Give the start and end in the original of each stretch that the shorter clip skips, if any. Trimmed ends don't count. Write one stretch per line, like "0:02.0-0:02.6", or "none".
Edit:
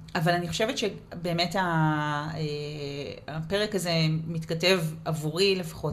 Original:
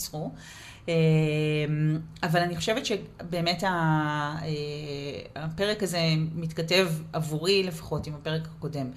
none